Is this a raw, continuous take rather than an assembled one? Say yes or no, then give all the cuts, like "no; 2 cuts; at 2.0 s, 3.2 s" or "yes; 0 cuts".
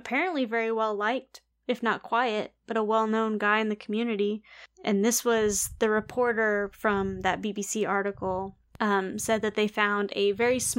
yes; 0 cuts